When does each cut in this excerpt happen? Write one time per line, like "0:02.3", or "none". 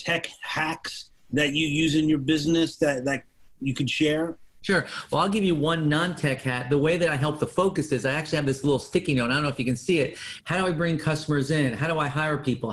0:10.4